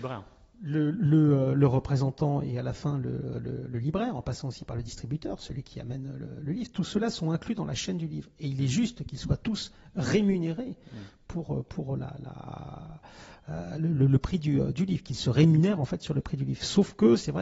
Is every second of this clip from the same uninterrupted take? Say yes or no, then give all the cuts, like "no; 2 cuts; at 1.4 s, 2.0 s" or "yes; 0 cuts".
yes; 0 cuts